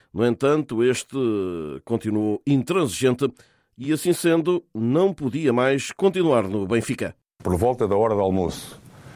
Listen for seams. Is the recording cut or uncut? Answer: uncut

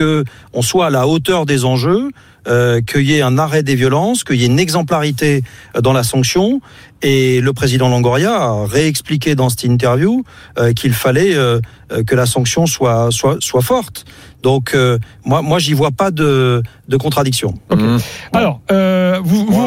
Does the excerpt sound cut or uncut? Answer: uncut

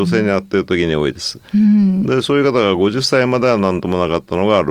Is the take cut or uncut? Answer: uncut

